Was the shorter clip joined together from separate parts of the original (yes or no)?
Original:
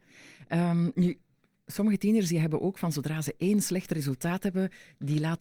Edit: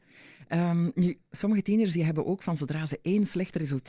yes